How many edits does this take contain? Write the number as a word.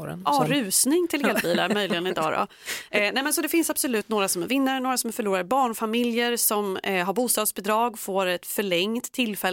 zero